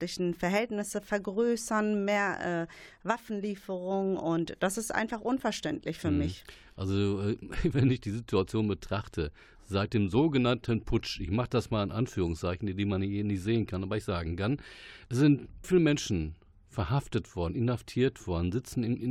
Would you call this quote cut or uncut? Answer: cut